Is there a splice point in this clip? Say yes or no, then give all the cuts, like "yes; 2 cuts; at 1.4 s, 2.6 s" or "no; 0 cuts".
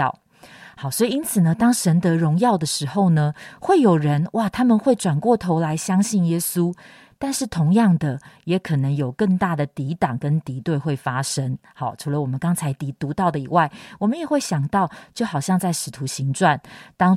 no; 0 cuts